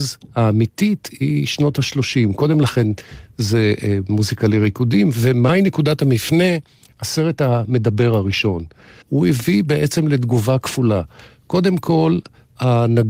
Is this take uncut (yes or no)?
yes